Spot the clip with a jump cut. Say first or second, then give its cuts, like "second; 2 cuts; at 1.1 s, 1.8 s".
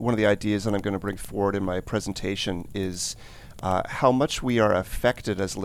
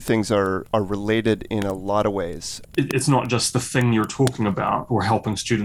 second; 1 cut; at 2.6 s